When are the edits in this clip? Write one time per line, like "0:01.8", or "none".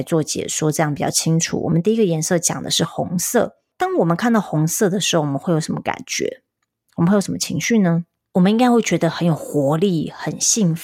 none